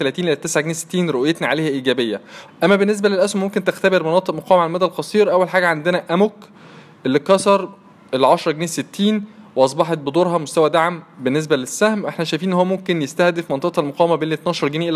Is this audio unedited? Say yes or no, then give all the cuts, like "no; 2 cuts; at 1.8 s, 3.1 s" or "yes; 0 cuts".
no; 1 cut; at 2.5 s